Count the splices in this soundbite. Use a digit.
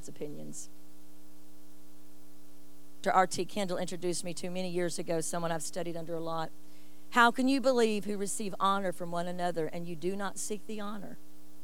1